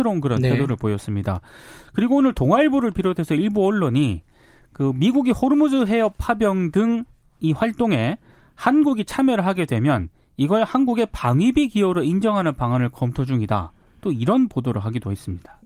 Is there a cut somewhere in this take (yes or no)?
no